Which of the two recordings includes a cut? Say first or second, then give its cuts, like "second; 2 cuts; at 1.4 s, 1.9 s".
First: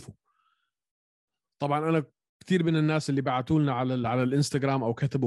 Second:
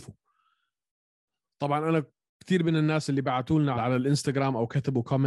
second; 1 cut; at 3.7 s